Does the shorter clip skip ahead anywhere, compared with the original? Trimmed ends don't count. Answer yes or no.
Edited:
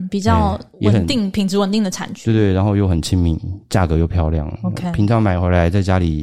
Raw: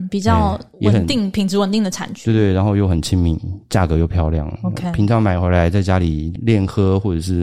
no